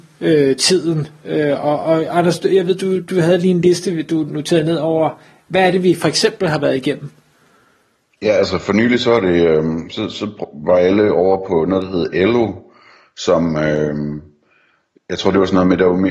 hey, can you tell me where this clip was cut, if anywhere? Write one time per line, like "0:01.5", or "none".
none